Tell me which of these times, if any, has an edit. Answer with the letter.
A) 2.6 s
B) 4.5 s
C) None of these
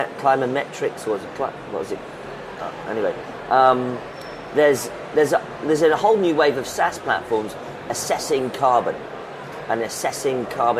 A